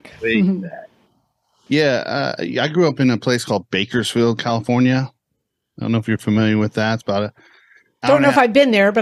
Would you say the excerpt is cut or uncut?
uncut